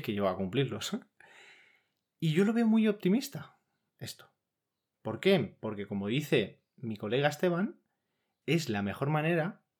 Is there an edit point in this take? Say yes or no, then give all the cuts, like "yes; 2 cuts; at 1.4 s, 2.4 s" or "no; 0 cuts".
no; 0 cuts